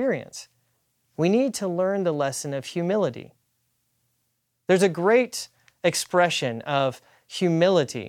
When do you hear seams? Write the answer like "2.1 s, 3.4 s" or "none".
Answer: none